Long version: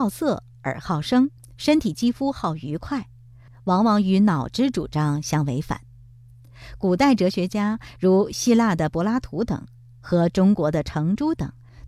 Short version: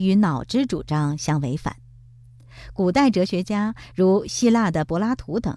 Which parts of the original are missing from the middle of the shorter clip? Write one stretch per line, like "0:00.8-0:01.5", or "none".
none

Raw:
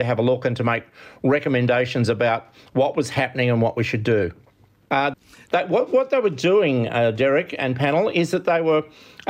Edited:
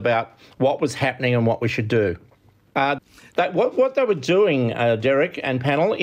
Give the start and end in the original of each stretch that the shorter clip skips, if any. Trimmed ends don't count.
none

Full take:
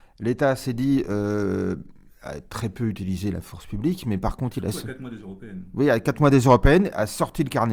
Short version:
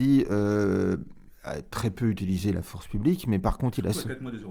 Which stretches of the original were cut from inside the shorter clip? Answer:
none

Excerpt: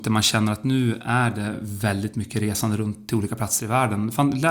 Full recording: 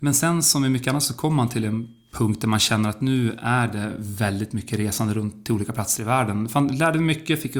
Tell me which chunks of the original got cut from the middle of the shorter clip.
none

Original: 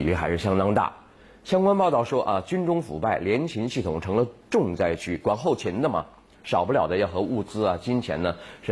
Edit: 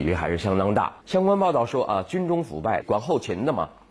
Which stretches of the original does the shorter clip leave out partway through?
0:01.0-0:01.4
0:03.2-0:05.2

